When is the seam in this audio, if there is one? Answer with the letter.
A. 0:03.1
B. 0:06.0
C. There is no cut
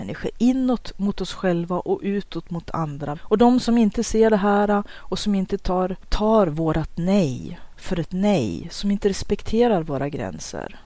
A